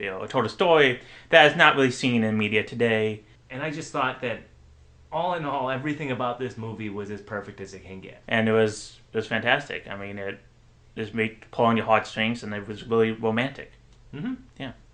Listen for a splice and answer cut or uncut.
cut